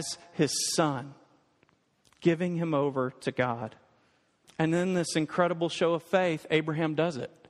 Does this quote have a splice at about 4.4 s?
yes; 1 cut; at 4.4 s

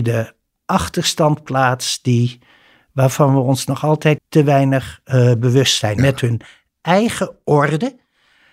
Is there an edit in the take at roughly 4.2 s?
yes; 2 cuts; at 4.2 s, 6.0 s

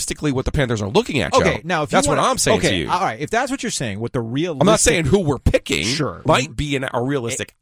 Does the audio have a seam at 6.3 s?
yes; 1 cut; at 6.3 s

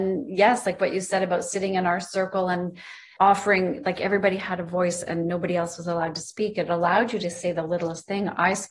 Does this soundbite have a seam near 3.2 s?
yes; 1 cut; at 3.2 s

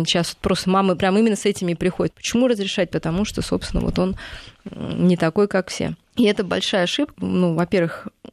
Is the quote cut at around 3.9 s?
no; 3 cuts; at 2.1 s, 6.0 s, 7.1 s

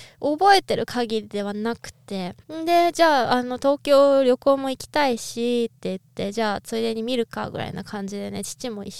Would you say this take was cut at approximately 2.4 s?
yes; 1 cut; at 2.4 s

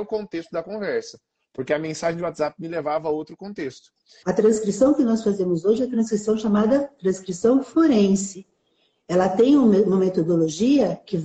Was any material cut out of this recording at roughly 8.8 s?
no; 1 cut; at 4.2 s

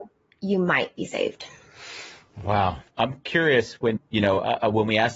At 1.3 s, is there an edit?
no; 2 cuts; at 2.9 s, 4.0 s

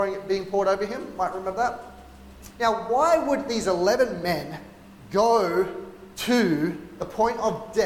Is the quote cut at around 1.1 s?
no; 1 cut; at 2.5 s

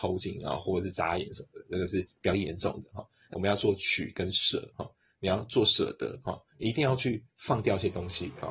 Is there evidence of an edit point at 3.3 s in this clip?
yes; 1 cut; at 3.3 s

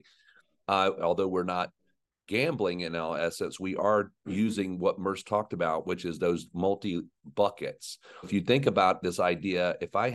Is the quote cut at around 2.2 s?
no; 2 cuts; at 1.0 s, 8.2 s

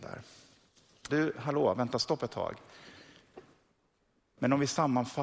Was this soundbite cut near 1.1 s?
yes; 1 cut; at 1.1 s

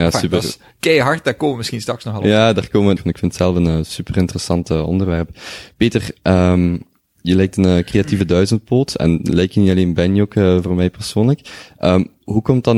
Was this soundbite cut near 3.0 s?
yes; 1 cut; at 3.0 s

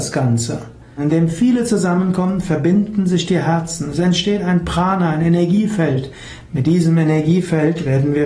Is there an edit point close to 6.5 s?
no; 1 cut; at 1.0 s

